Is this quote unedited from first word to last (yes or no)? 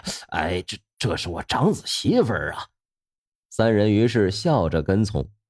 no